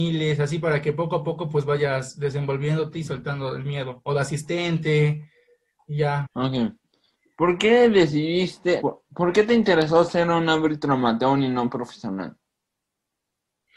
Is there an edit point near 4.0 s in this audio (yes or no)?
no